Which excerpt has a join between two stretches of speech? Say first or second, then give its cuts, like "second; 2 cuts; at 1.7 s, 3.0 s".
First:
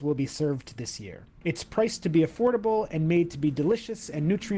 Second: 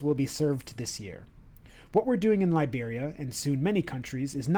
first; 1 cut; at 1.4 s